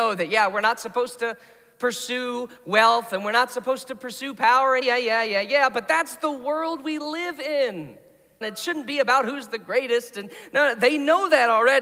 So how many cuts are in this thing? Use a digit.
2